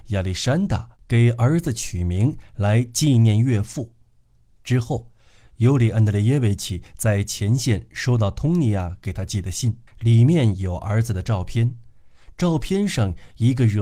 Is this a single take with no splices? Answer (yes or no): no